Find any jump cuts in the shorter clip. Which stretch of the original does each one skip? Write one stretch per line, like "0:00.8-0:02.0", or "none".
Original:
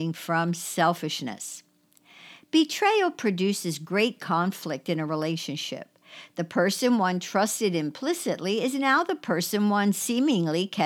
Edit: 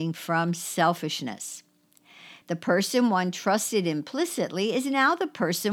0:02.4-0:06.3